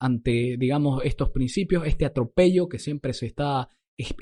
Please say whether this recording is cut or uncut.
uncut